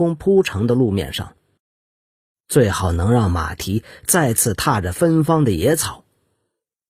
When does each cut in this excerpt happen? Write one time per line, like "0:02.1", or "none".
none